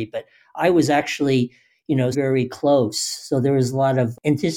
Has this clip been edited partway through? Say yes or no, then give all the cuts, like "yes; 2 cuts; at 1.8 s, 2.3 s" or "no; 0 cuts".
yes; 1 cut; at 2.1 s